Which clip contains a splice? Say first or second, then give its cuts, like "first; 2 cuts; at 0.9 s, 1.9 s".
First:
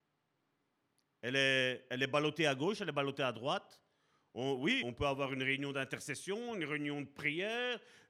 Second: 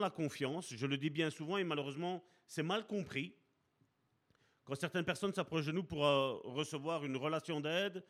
first; 1 cut; at 4.8 s